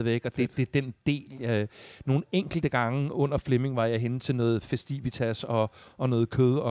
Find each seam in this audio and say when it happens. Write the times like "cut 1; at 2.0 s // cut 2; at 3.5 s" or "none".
none